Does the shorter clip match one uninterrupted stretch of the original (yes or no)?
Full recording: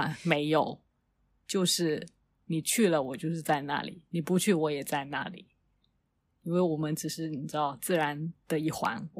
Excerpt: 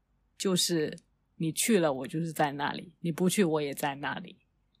yes